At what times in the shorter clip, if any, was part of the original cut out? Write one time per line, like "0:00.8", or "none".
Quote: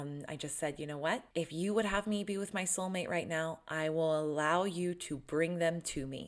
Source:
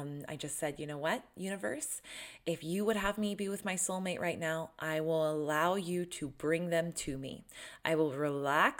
0:01.3